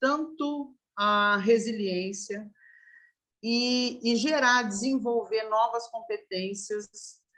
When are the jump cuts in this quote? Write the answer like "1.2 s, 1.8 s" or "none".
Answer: none